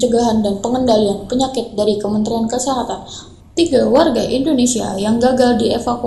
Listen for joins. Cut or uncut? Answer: cut